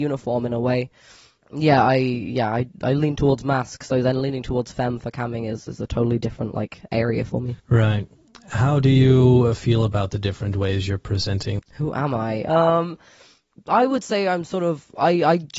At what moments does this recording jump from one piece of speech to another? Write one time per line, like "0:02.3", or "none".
0:07.6
0:11.6